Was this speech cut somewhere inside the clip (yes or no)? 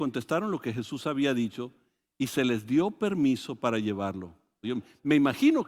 yes